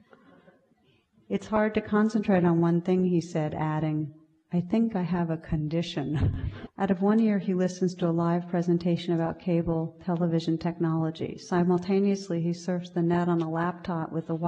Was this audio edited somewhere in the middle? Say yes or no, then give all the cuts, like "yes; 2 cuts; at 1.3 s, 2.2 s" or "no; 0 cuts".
yes; 1 cut; at 6.7 s